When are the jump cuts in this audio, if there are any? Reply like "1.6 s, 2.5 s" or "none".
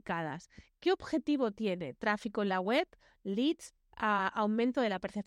none